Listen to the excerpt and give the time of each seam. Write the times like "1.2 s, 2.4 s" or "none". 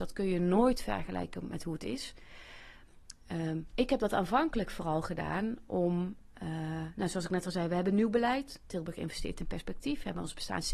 none